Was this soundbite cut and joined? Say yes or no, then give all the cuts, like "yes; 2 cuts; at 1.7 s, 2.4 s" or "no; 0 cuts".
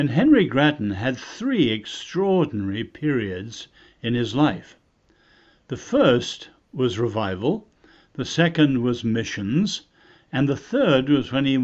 no; 0 cuts